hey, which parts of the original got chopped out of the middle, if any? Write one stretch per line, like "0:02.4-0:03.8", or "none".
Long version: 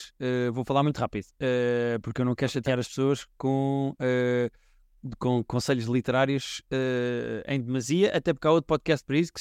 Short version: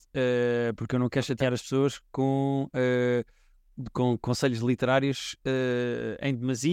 none